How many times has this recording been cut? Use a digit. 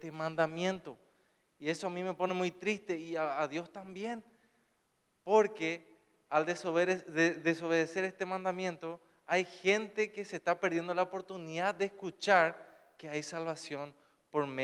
0